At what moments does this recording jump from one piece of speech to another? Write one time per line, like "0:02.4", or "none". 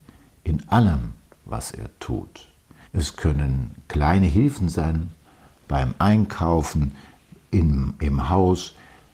0:02.8